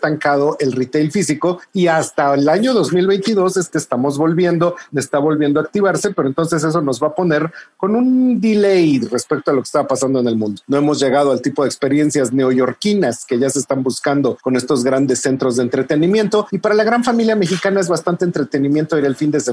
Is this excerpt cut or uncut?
cut